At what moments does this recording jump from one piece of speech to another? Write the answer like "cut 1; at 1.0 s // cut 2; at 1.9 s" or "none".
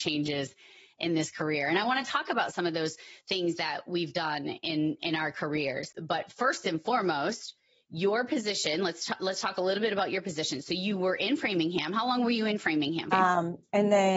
cut 1; at 13.1 s